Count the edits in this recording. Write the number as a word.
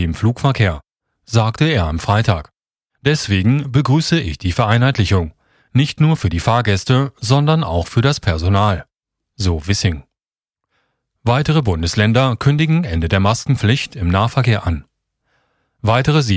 zero